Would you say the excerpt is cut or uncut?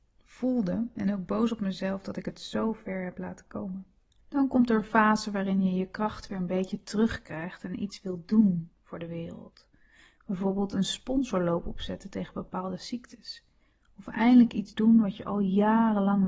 uncut